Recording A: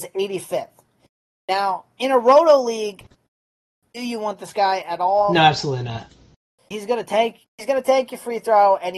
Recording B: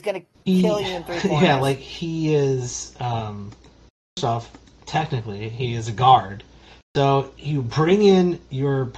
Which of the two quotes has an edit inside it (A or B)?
A